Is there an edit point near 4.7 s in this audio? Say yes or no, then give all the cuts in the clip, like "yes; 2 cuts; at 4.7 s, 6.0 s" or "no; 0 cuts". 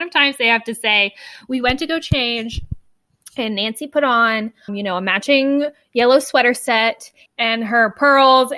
yes; 2 cuts; at 4.7 s, 7.3 s